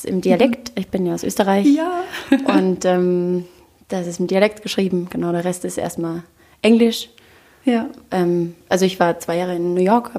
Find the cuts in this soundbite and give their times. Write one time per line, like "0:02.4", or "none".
0:08.6